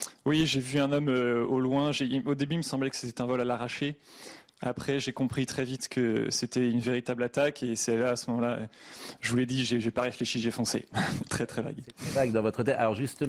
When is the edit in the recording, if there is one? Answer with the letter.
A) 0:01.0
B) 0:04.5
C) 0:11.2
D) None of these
C